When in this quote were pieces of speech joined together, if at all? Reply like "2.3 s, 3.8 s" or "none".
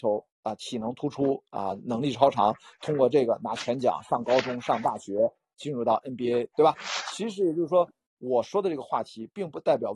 none